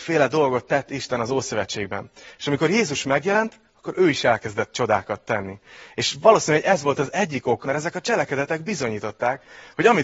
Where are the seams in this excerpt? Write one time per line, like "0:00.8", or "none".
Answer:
0:07.6